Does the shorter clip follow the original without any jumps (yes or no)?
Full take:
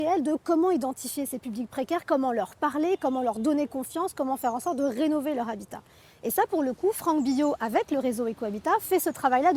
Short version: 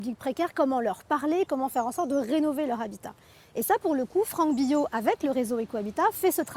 no